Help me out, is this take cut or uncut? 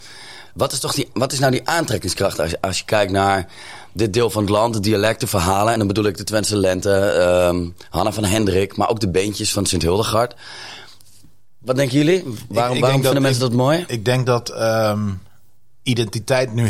uncut